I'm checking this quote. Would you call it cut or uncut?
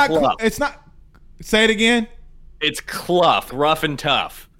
cut